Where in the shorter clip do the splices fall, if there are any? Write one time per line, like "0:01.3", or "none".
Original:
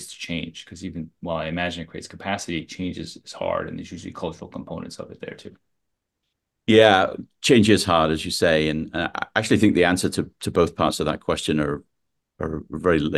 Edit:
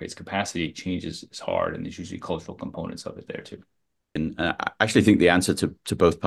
0:04.2